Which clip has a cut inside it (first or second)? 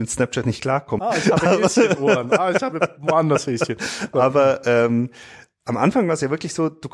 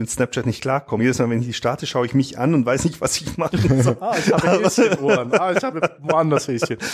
first